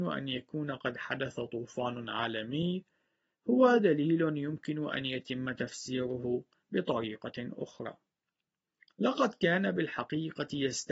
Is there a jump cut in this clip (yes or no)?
no